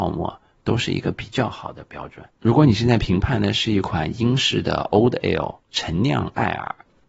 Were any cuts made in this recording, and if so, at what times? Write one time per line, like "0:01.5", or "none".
0:02.3
0:05.6